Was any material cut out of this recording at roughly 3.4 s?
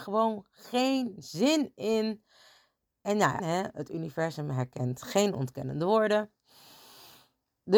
yes; 1 cut; at 3.4 s

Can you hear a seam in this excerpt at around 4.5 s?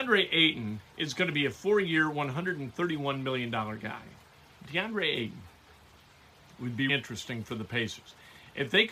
yes; 2 cuts; at 4.5 s, 6.9 s

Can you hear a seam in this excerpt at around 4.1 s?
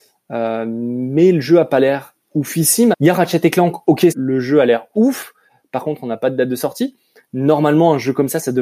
yes; 2 cuts; at 2.9 s, 4.1 s

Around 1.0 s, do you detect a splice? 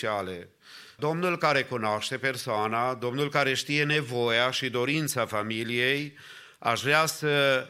yes; 1 cut; at 1.0 s

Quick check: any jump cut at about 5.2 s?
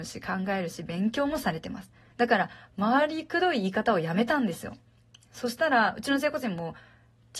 no; 1 cut; at 2.1 s

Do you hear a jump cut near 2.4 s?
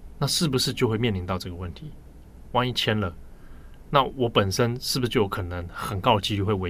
yes; 1 cut; at 2.4 s

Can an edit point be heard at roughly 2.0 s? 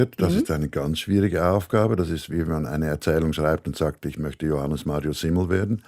no; 0 cuts

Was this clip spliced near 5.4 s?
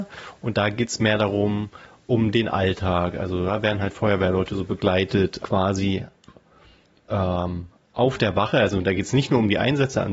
yes; 1 cut; at 5.4 s

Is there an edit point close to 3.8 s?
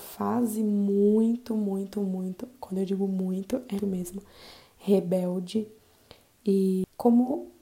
yes; 1 cut; at 3.8 s

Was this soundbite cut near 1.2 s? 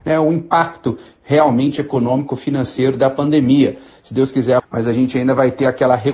no; 1 cut; at 4.6 s

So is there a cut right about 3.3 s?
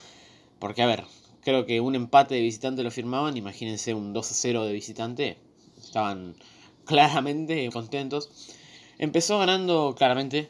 no; 2 cuts; at 7.7 s, 8.8 s

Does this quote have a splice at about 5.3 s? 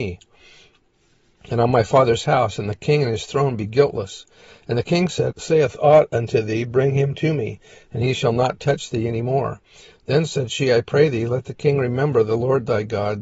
yes; 1 cut; at 5.3 s

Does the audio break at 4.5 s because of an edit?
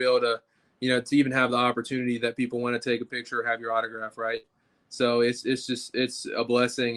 no; 0 cuts

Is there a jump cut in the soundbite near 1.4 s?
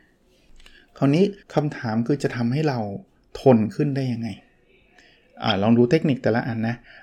yes; 1 cut; at 1.4 s

